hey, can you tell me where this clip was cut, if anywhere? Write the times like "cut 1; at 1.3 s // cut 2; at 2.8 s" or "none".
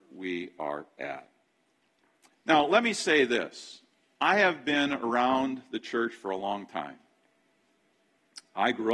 cut 1; at 2.3 s